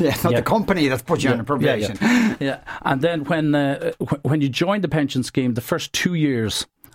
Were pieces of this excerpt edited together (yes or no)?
no